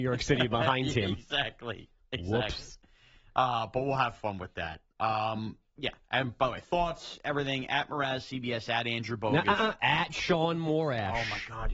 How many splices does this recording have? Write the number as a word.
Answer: zero